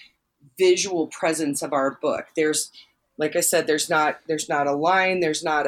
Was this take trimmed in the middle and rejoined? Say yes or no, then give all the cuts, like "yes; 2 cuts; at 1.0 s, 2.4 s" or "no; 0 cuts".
no; 0 cuts